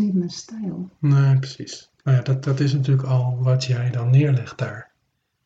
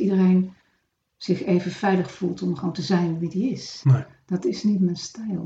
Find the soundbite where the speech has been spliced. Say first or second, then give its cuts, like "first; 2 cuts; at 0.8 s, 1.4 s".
second; 1 cut; at 3.8 s